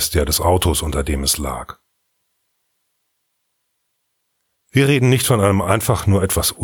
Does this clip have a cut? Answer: no; 0 cuts

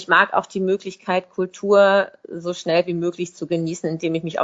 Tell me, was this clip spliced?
no; 0 cuts

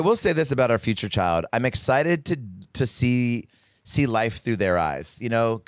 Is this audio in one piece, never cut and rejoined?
yes; 0 cuts

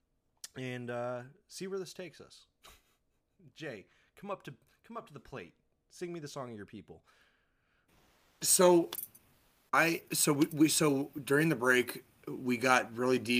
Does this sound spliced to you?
no; 0 cuts

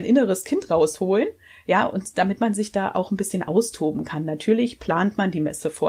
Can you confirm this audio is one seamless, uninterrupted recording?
yes; 0 cuts

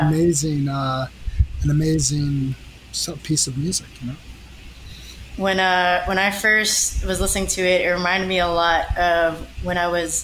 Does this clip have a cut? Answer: yes; 1 cut; at 5.3 s

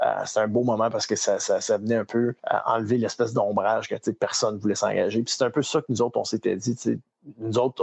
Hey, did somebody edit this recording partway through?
yes; 1 cut; at 2.4 s

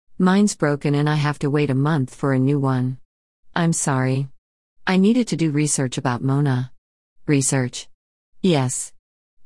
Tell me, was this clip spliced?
no; 0 cuts

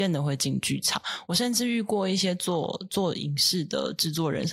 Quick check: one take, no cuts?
yes; 0 cuts

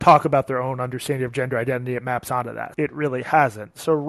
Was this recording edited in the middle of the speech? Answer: yes; 1 cut; at 2.7 s

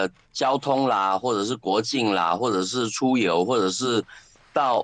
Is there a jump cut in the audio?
no; 0 cuts

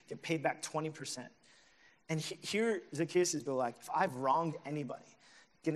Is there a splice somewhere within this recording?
yes; 1 cut; at 3.5 s

